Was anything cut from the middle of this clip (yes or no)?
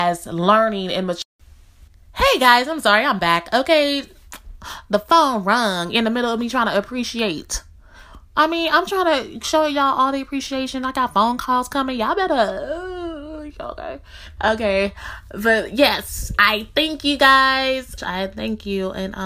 yes